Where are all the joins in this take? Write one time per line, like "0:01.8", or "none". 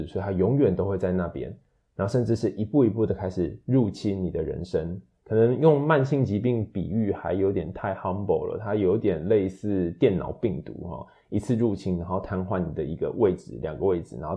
none